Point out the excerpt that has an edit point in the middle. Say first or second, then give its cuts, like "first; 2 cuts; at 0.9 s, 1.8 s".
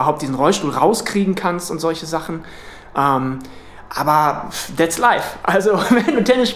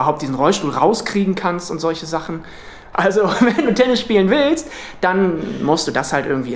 second; 1 cut; at 2.9 s